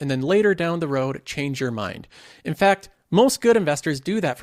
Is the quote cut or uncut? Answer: uncut